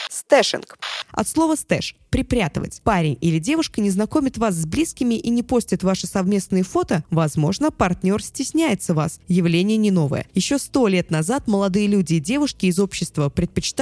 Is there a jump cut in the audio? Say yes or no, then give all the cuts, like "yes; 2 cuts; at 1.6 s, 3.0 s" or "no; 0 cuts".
no; 0 cuts